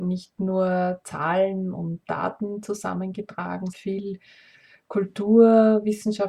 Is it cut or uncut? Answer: cut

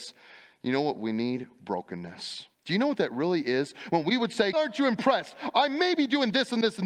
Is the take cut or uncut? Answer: cut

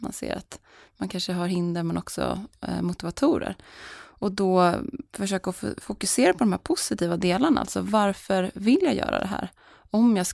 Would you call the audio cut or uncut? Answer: uncut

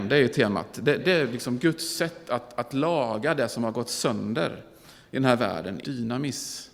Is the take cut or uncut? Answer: cut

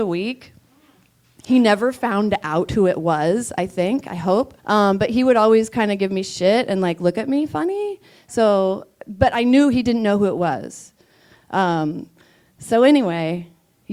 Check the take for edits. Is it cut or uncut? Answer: cut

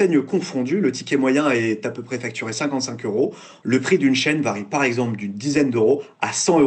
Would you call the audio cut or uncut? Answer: cut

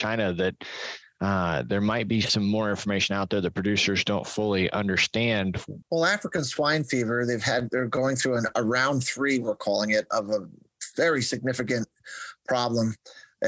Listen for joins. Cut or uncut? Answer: cut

